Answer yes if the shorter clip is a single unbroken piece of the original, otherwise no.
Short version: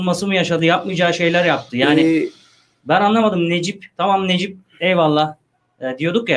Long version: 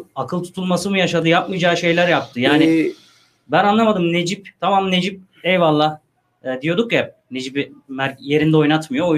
yes